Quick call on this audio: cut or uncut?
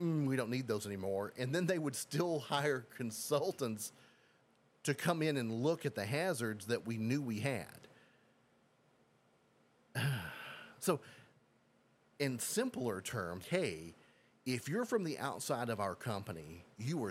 cut